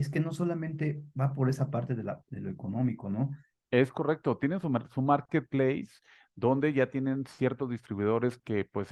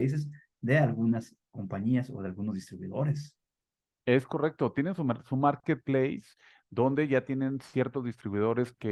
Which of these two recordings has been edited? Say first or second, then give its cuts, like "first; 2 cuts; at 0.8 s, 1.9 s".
first; 1 cut; at 3.5 s